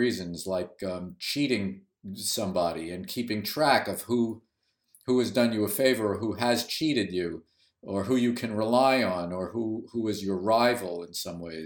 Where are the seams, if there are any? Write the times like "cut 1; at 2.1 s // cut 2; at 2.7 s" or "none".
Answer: none

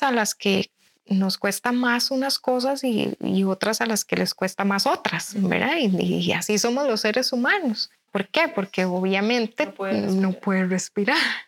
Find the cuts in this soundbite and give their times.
cut 1; at 8.1 s

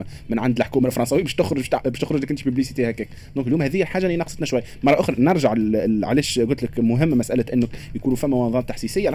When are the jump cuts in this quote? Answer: none

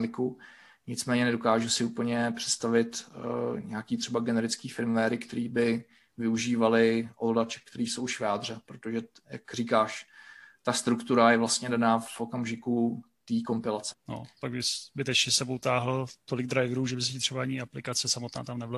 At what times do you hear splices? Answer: cut 1; at 13.9 s

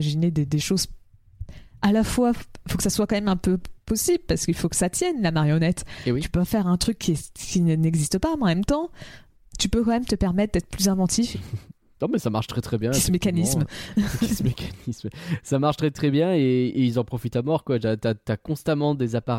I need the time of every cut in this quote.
cut 1; at 11.3 s

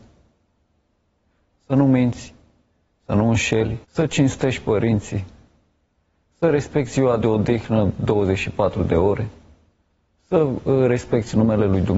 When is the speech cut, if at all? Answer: cut 1; at 3.8 s

